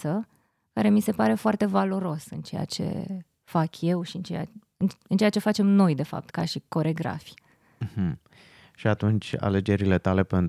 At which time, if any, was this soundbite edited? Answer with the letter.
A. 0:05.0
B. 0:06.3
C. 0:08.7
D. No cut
B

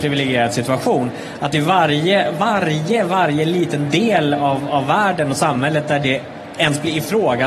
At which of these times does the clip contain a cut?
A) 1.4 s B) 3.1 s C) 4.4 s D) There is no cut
D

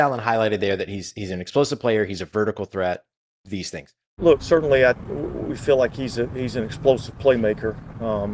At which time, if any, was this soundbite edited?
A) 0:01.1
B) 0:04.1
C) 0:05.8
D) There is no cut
B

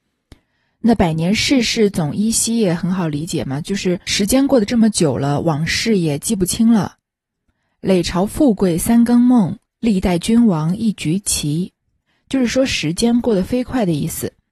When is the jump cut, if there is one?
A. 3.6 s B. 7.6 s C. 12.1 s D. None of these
C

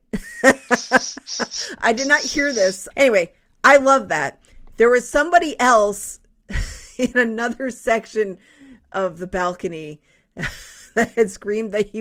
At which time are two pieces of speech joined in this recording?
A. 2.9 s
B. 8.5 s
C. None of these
A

